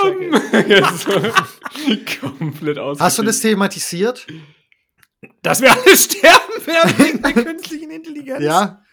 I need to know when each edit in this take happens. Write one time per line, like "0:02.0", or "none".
none